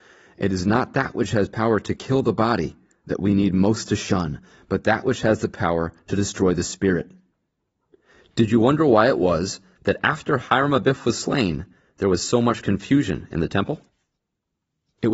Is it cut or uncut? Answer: uncut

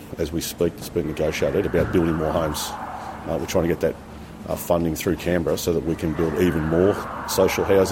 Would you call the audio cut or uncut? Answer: uncut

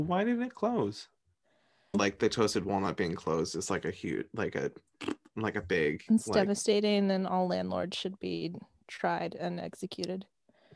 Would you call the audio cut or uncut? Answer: cut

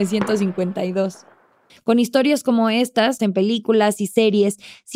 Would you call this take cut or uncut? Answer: cut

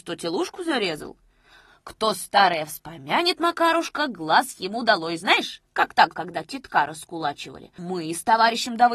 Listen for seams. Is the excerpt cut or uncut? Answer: cut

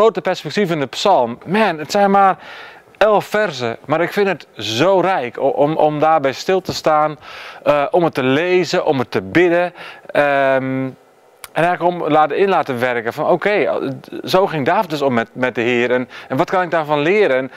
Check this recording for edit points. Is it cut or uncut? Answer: uncut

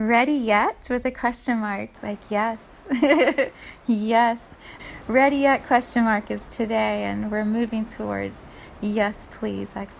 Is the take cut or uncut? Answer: cut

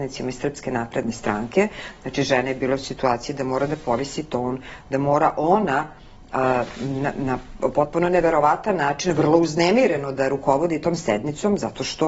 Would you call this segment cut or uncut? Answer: uncut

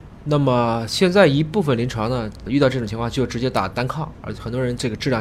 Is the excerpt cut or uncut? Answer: cut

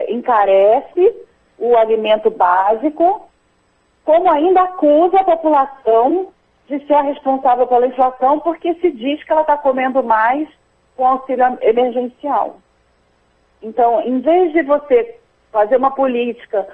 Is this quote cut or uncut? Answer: uncut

